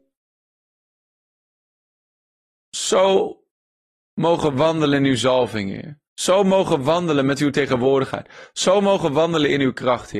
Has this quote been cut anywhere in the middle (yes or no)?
no